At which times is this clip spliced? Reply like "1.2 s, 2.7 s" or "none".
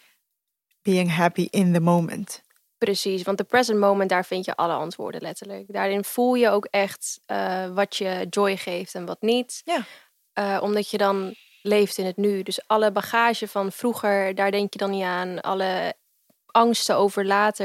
none